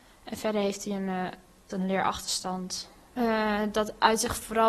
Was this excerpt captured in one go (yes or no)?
no